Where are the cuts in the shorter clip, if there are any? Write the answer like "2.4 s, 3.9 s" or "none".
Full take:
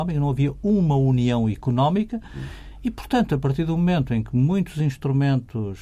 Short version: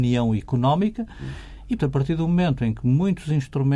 1.8 s